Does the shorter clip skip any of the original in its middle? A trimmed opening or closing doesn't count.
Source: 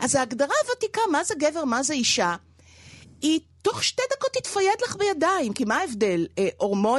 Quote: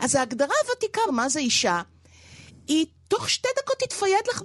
yes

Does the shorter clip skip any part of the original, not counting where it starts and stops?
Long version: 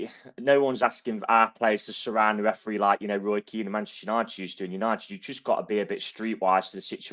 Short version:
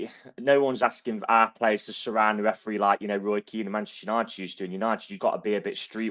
yes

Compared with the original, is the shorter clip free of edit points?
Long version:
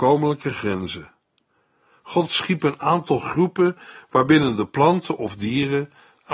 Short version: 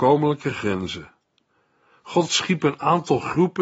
yes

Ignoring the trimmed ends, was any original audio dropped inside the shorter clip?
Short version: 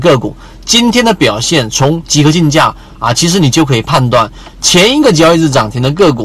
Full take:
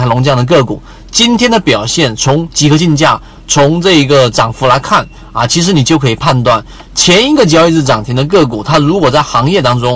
yes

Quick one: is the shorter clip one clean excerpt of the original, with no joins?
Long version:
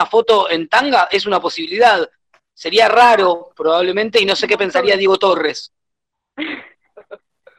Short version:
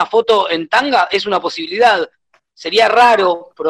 yes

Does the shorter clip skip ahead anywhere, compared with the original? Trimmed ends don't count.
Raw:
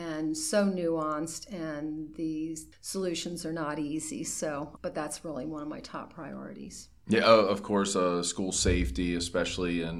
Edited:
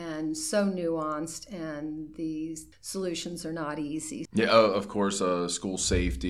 yes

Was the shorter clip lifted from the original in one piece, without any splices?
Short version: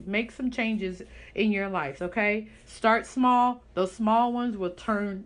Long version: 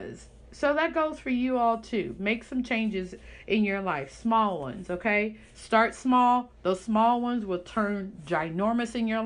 no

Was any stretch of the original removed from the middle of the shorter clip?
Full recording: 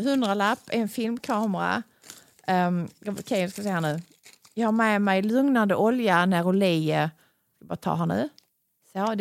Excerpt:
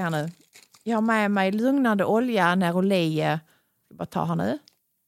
no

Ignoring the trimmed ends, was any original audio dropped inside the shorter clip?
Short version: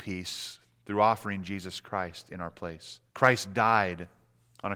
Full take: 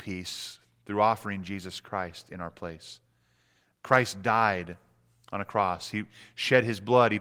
yes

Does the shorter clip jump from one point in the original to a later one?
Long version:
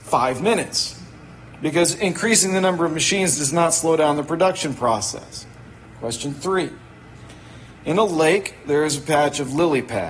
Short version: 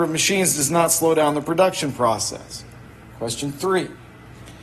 no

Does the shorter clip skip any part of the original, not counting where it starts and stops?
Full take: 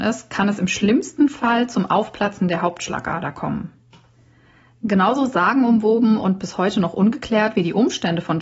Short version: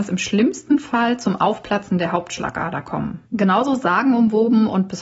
yes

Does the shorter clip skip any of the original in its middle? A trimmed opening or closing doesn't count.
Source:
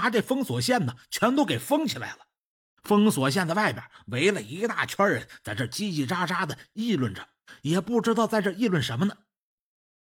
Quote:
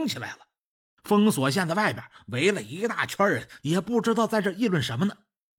yes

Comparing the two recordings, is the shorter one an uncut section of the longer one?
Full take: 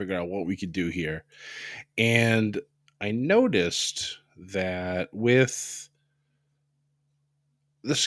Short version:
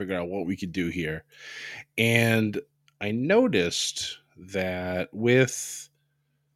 yes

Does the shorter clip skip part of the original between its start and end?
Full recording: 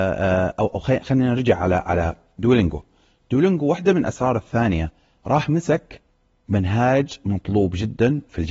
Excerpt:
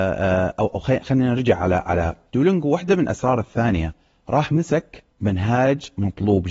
yes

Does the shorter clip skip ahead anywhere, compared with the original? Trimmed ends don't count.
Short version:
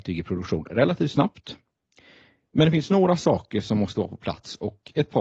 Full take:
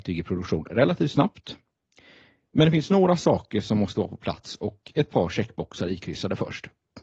no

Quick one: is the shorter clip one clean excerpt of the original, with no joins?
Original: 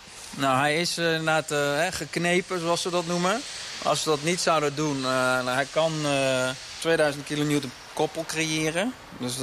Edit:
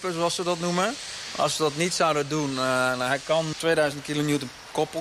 no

